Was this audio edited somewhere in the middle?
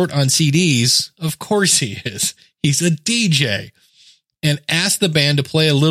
no; 0 cuts

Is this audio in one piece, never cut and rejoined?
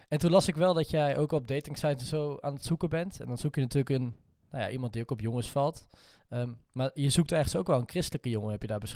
yes; 0 cuts

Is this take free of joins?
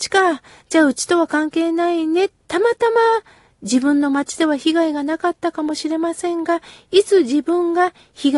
no; 1 cut; at 2.4 s

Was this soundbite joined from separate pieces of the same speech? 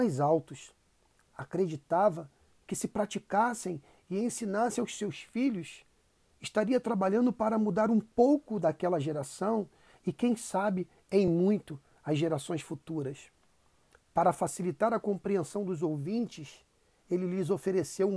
no; 0 cuts

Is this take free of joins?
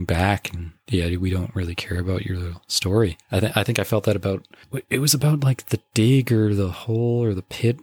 yes; 0 cuts

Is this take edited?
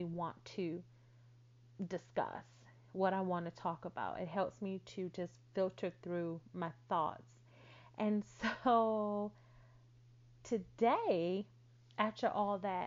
no; 0 cuts

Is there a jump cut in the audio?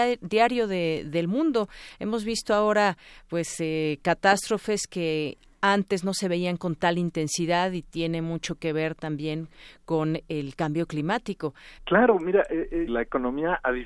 yes; 2 cuts; at 11.8 s, 12.9 s

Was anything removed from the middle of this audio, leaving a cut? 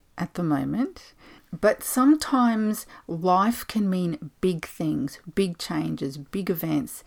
yes; 1 cut; at 1.4 s

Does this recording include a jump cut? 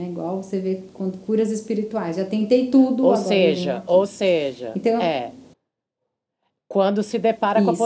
no; 0 cuts

